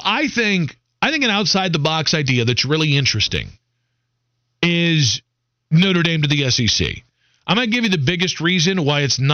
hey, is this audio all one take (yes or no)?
yes